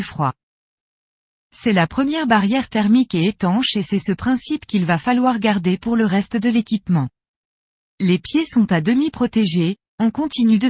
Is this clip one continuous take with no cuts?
yes; 0 cuts

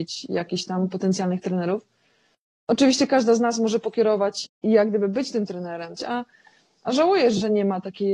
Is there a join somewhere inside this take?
yes; 2 cuts; at 4.4 s, 6.0 s

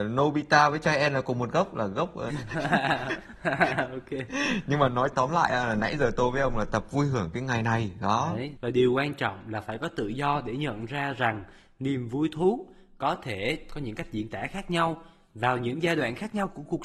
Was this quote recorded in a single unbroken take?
no; 1 cut; at 2.3 s

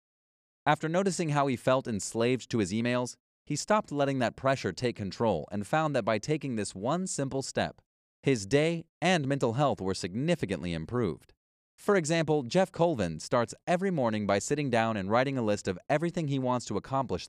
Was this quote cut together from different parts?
yes; 2 cuts; at 11.6 s, 13.2 s

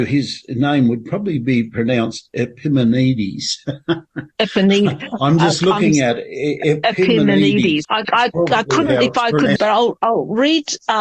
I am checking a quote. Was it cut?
yes; 2 cuts; at 7.8 s, 9.6 s

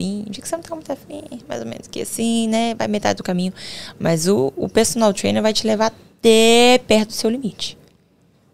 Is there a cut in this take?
no; 0 cuts

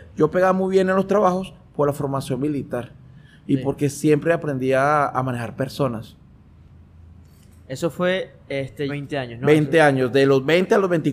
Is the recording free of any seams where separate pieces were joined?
no; 1 cut; at 8.9 s

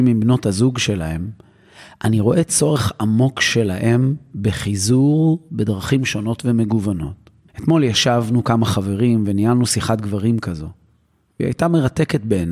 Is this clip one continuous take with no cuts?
yes; 0 cuts

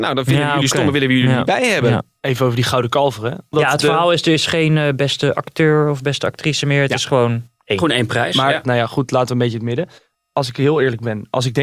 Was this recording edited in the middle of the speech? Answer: yes; 2 cuts; at 8.6 s, 10.1 s

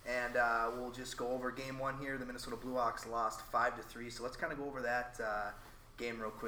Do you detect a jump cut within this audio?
no; 0 cuts

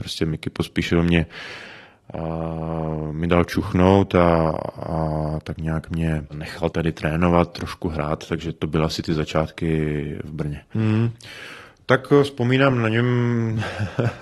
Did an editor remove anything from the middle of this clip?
yes; 2 cuts; at 6.7 s, 10.7 s

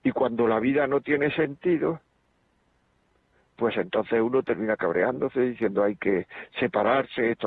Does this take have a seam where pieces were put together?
no; 0 cuts

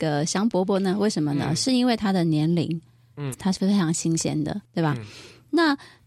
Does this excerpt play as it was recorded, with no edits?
no; 2 cuts; at 3.3 s, 4.7 s

